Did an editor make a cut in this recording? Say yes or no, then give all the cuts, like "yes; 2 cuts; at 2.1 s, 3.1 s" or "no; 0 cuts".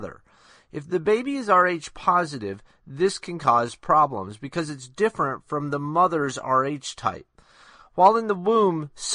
no; 0 cuts